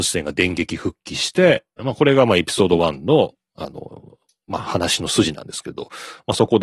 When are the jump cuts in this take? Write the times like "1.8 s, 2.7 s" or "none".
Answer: 1.8 s